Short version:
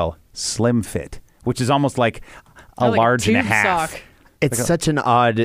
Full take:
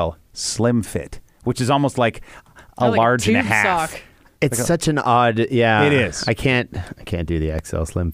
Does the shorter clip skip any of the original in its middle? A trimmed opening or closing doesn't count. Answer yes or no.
no